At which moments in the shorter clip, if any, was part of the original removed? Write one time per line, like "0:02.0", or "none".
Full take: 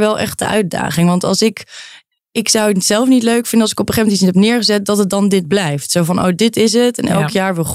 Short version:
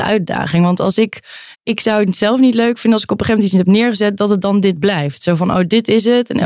0:01.5